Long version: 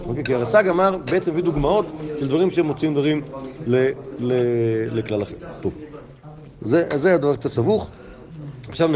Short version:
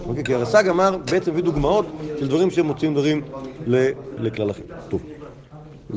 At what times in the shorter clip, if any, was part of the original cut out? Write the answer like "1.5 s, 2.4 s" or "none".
4.2 s